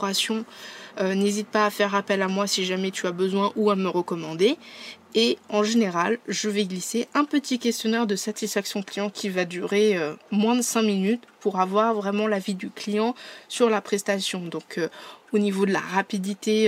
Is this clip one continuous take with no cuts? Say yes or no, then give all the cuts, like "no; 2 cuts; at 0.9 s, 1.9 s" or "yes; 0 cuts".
yes; 0 cuts